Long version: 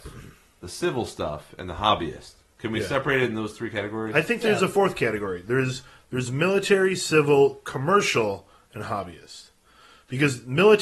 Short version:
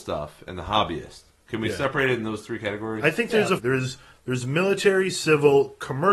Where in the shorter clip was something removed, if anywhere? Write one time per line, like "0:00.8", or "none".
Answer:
0:03.6